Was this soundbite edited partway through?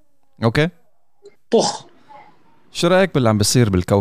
yes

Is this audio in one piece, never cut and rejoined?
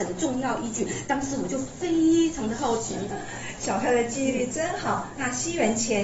no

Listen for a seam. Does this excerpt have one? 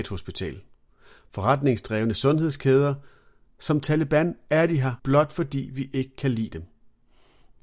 yes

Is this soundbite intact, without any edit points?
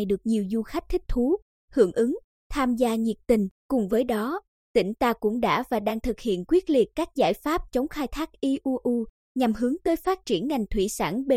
no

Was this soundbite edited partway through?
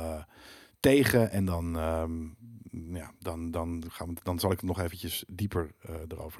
no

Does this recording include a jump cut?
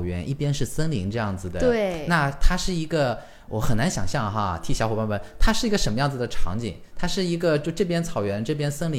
no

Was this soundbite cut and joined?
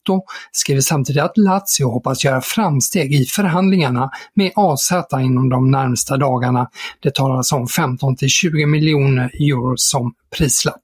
no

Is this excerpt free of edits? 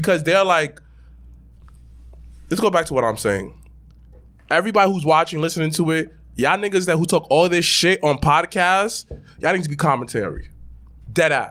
yes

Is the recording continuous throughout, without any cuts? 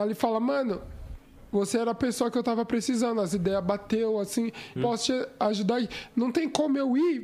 no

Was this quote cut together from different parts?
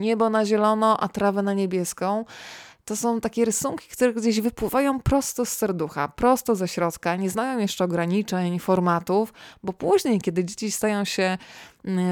no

